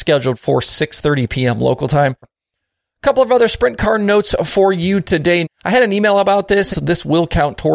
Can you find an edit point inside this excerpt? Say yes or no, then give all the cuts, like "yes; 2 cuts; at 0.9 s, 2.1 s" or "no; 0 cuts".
yes; 3 cuts; at 2.2 s, 5.4 s, 6.7 s